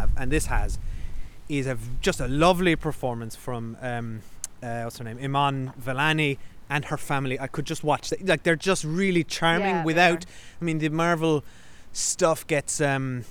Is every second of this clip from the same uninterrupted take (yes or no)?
yes